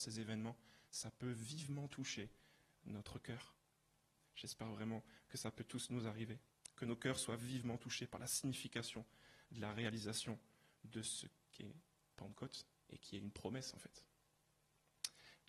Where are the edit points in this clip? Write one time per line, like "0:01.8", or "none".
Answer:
0:04.2